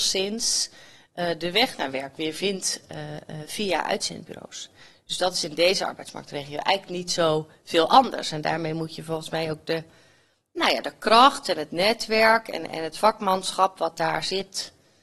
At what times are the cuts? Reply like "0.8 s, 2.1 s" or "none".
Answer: none